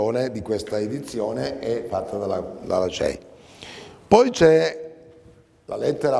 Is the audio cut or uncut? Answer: uncut